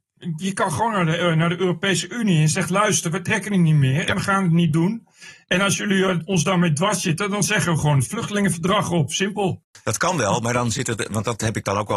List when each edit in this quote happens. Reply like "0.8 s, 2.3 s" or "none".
none